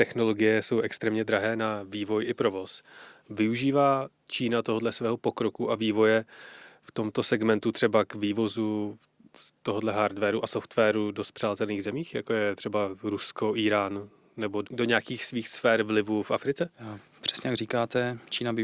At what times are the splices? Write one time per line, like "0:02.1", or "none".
0:14.6